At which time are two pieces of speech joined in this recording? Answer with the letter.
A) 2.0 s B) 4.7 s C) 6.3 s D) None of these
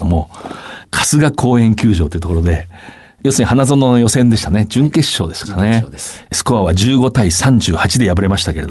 C